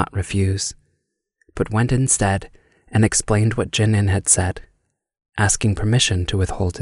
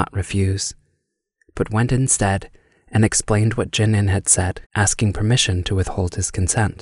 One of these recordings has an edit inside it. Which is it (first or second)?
second